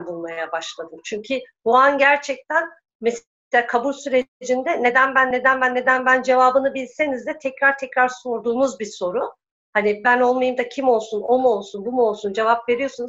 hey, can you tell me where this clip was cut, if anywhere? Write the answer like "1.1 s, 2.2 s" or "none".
none